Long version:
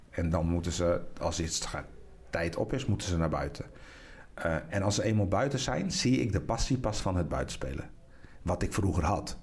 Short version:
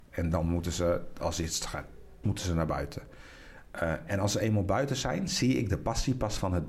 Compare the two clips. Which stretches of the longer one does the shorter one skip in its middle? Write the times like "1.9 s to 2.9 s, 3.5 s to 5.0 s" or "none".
2.2 s to 2.9 s